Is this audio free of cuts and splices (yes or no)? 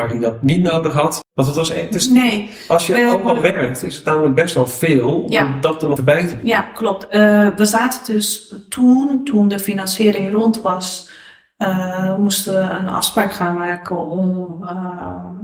no